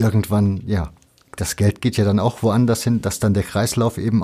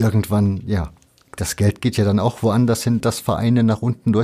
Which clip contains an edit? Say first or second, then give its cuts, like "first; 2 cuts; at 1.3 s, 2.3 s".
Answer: second; 1 cut; at 3.0 s